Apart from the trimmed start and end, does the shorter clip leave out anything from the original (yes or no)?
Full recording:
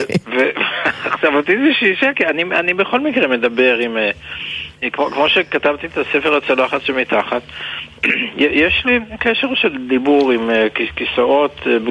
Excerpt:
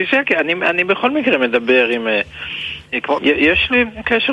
yes